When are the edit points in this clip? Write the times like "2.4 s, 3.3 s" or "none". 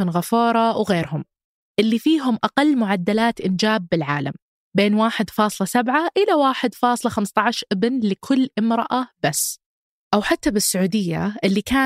none